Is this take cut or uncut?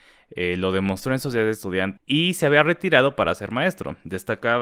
cut